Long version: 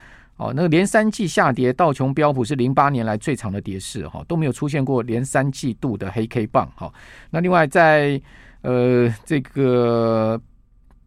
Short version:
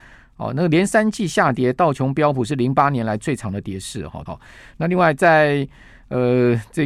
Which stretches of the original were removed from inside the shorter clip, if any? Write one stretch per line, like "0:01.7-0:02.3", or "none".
0:04.3-0:06.8